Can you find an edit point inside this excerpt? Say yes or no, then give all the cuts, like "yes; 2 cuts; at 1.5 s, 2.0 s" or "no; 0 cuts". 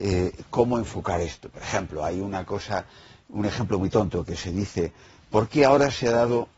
no; 0 cuts